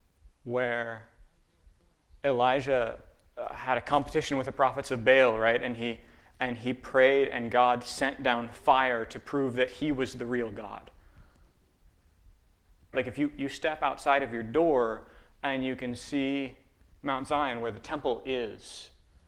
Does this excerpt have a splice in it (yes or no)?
yes